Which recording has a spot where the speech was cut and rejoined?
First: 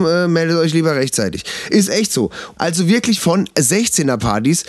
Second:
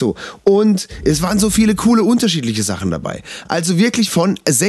first; 1 cut; at 2.6 s

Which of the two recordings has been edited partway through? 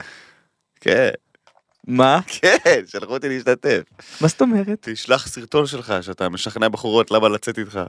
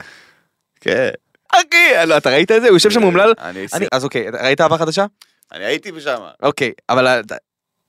second; 2 cuts; at 1.5 s, 3.9 s

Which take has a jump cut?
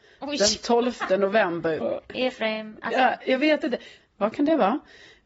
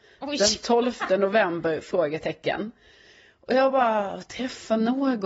first; 2 cuts; at 1.8 s, 4.0 s

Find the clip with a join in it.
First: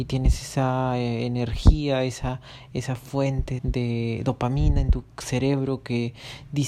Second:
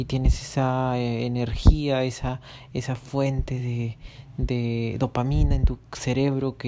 first; 1 cut; at 3.6 s

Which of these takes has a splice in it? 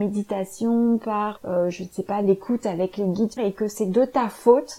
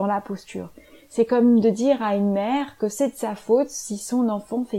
first; 2 cuts; at 1.4 s, 3.4 s

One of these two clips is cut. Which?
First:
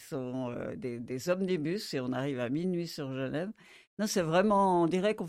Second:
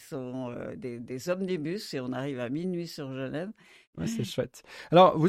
second; 1 cut; at 3.9 s

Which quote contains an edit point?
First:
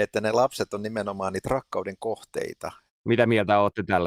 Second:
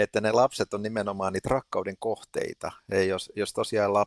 first; 1 cut; at 2.9 s

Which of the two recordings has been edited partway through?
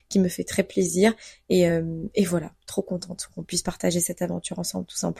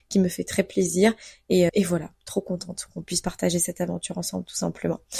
second; 1 cut; at 1.7 s

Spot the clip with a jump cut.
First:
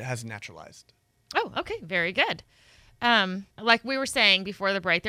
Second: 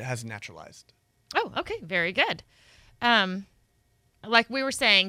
first; 1 cut; at 3.5 s

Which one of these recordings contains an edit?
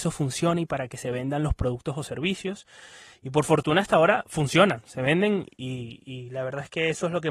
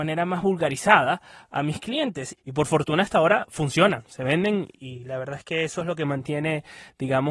second; 2 cuts; at 2.4 s, 4.8 s

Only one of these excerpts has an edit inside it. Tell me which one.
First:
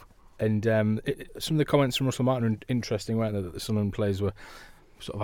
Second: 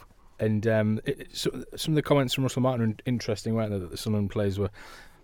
first; 1 cut; at 1.3 s

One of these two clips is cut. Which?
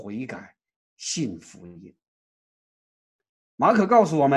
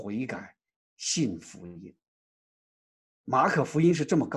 second; 1 cut; at 3.0 s

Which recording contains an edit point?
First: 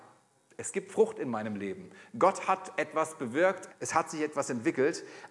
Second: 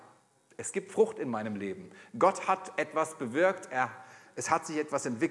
first; 1 cut; at 3.7 s

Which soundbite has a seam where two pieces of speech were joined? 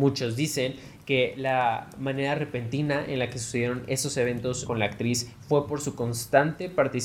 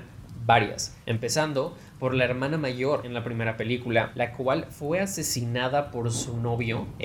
second; 1 cut; at 1.0 s

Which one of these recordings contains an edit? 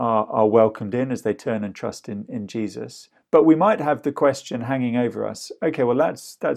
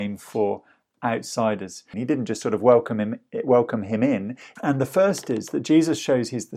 second; 2 cuts; at 1.9 s, 4.6 s

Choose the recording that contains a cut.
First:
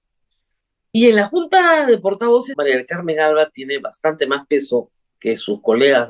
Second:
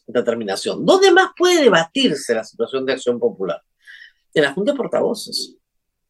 first; 1 cut; at 2.5 s

